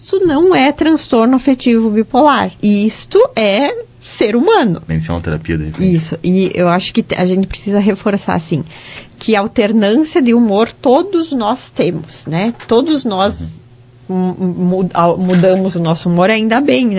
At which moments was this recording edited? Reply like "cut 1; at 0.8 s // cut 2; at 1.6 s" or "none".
cut 1; at 2.6 s // cut 2; at 4.9 s